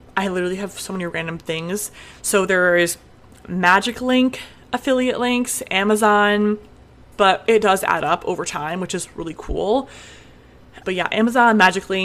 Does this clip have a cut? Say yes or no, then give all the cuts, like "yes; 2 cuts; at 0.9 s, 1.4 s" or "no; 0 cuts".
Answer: yes; 2 cuts; at 7.1 s, 10.8 s